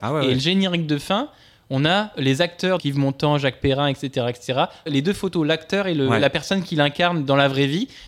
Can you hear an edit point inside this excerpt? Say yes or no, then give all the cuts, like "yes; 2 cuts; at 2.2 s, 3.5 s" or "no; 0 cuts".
yes; 2 cuts; at 2.8 s, 4.9 s